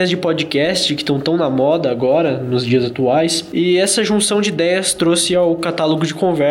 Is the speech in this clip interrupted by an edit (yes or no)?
no